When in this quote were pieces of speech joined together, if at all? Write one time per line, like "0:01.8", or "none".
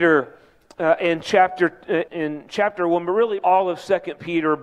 0:02.1
0:03.4